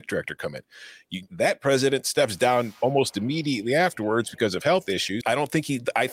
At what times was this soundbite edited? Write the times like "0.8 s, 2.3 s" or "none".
1.3 s, 5.2 s